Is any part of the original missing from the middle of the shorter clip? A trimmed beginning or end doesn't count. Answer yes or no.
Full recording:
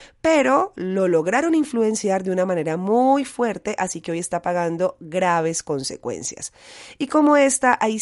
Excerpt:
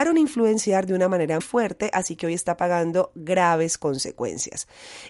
yes